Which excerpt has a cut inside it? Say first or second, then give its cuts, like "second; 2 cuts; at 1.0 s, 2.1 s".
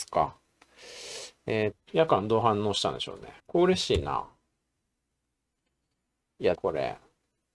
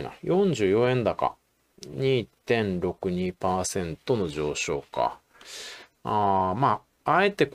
first; 3 cuts; at 1.7 s, 3.4 s, 6.5 s